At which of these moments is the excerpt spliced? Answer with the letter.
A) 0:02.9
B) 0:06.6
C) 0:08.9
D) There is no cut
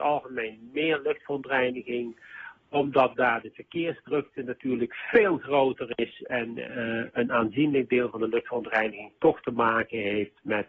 D